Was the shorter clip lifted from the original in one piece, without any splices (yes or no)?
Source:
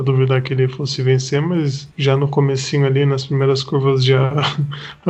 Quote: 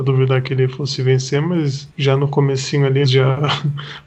no